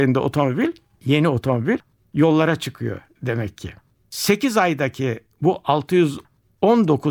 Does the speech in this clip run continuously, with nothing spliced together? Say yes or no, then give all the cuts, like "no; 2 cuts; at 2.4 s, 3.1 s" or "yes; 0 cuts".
no; 1 cut; at 4.0 s